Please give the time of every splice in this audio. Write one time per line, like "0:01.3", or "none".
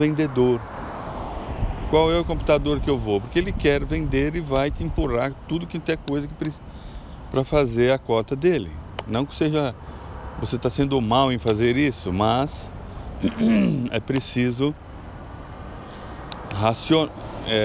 none